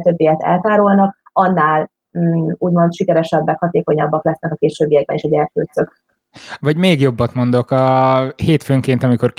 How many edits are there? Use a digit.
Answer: 1